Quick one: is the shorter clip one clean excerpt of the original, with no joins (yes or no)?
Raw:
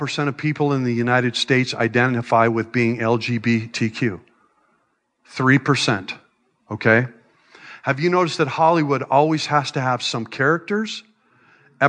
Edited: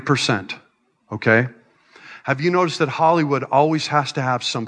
yes